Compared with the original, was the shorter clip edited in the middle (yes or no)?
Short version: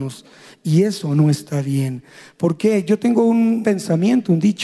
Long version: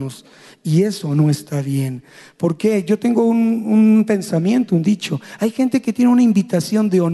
yes